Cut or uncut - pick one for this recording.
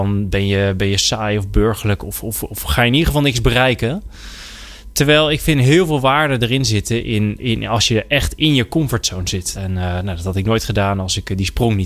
cut